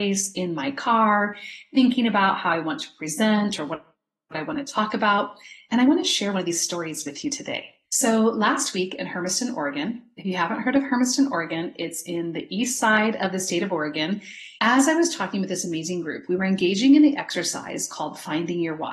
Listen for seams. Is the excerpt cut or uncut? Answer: cut